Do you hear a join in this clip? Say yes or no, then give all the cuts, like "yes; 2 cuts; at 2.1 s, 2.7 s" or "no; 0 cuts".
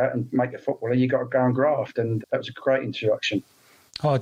yes; 1 cut; at 2.2 s